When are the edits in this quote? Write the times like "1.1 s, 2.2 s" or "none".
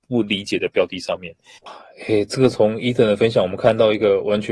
1.6 s